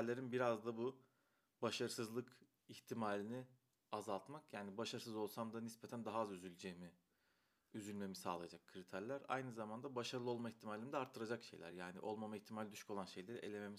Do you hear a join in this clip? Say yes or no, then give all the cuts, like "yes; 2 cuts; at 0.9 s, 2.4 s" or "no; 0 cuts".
no; 0 cuts